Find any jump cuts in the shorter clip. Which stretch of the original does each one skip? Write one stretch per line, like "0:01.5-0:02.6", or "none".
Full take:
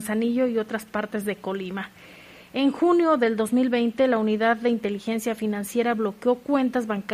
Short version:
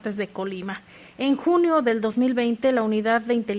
0:02.2-0:02.4